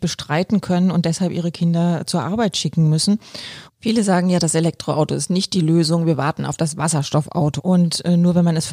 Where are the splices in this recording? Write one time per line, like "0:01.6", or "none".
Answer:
0:03.7
0:07.6